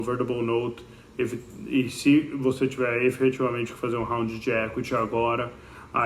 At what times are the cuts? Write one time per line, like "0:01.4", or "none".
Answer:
none